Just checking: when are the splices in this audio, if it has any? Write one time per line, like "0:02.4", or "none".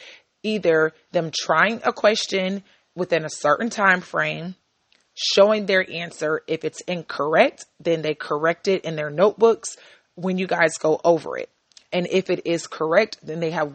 none